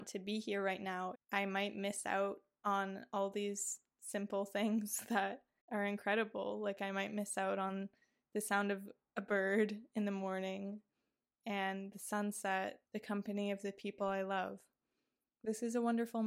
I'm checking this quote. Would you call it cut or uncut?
cut